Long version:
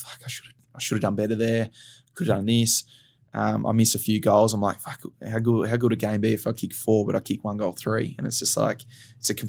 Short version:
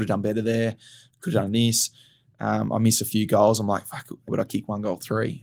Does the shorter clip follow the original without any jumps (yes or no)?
no